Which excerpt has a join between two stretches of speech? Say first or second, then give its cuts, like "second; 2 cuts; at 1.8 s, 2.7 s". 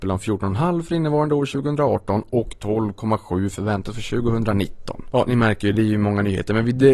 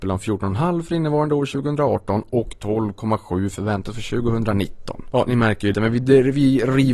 second; 1 cut; at 5.7 s